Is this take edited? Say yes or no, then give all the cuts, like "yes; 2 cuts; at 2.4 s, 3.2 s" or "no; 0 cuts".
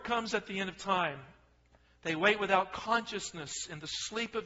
no; 0 cuts